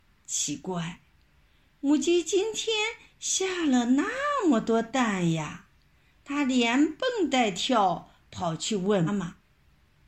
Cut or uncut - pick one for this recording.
cut